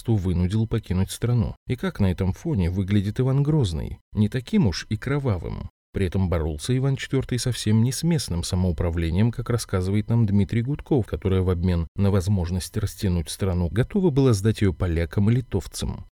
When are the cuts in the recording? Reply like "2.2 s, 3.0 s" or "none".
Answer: 11.1 s, 13.7 s

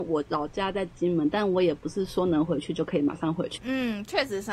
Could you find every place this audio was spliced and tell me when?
3.6 s

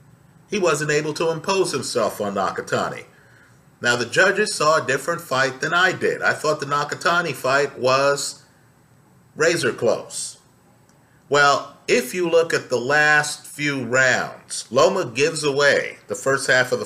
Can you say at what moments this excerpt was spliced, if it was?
none

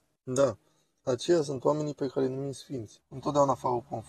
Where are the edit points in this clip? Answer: 3.0 s

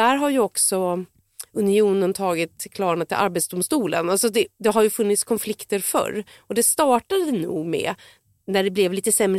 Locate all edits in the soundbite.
none

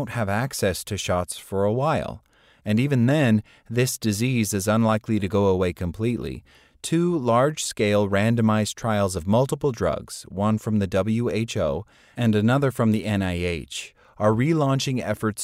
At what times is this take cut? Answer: none

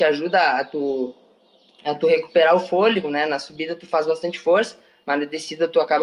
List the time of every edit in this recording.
none

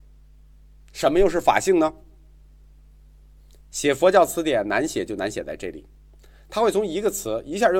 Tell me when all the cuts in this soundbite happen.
none

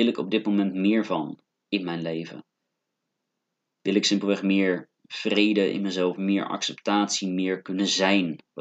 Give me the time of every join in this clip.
none

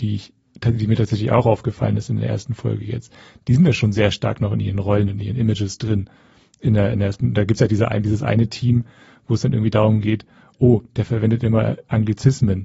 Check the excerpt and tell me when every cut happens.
none

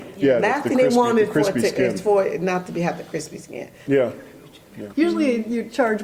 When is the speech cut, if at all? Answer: 3.9 s, 4.9 s

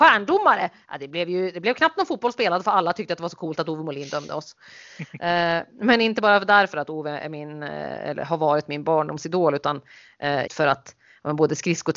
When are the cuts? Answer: 10.5 s

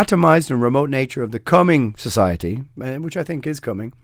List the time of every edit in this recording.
none

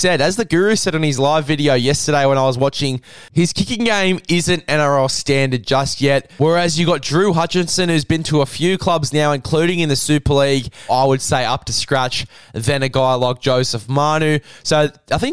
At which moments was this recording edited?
10.9 s

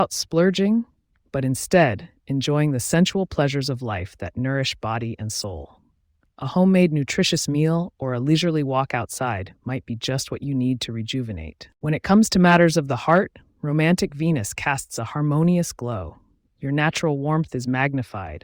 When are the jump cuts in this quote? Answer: none

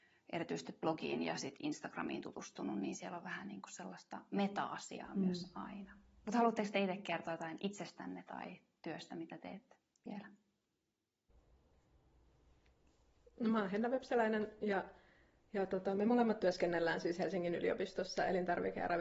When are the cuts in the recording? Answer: none

